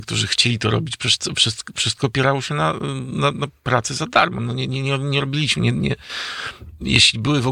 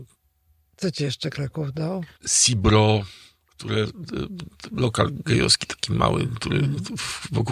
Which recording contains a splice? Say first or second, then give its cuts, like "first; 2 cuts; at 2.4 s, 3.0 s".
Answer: second; 1 cut; at 2.2 s